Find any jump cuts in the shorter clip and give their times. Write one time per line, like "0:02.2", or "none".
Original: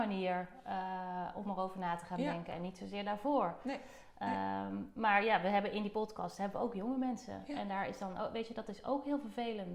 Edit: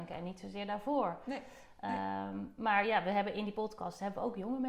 none

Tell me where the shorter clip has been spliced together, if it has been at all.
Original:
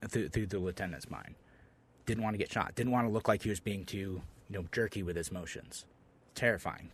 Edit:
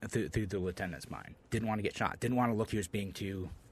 0:01.4
0:02.7

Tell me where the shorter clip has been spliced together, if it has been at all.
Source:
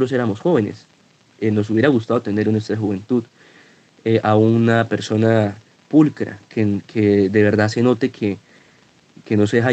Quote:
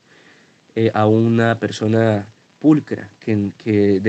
none

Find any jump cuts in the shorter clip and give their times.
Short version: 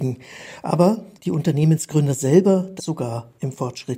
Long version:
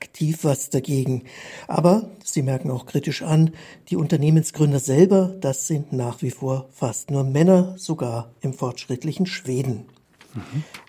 0:01.1
0:02.8

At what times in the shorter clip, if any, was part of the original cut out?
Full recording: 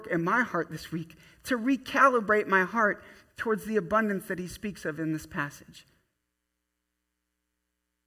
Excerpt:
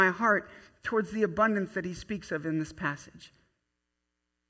none

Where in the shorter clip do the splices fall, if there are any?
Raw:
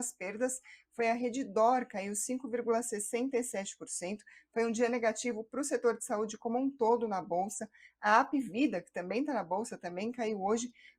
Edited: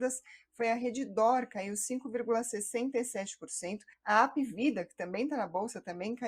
0:03.9

